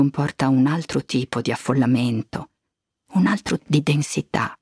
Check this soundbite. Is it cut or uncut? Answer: cut